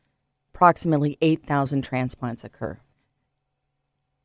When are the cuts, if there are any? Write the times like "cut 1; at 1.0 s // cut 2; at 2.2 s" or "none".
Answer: none